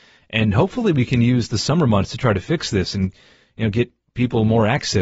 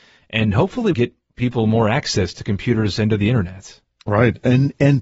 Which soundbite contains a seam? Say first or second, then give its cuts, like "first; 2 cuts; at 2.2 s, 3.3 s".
second; 1 cut; at 0.9 s